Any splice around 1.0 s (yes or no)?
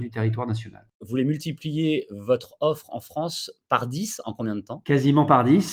yes